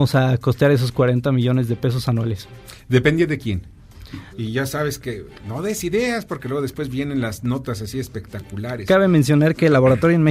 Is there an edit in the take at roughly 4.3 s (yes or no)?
yes